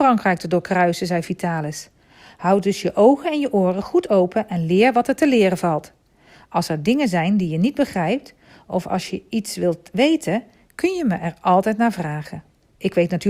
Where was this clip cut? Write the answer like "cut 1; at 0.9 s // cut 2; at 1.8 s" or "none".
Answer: none